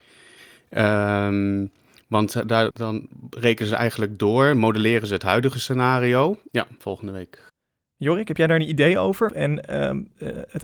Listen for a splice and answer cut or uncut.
cut